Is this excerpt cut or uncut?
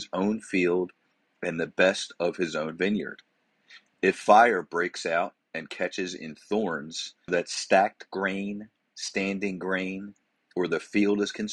cut